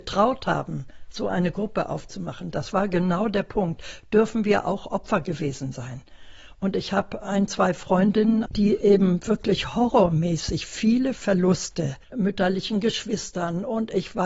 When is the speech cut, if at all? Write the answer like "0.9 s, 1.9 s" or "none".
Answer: 8.5 s, 12.0 s